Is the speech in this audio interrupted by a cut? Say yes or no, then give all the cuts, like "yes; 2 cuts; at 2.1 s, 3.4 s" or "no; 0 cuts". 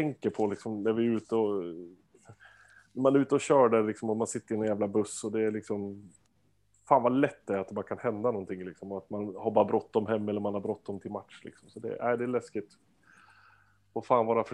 no; 0 cuts